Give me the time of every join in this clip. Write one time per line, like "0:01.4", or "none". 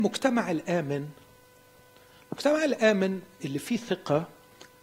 0:03.4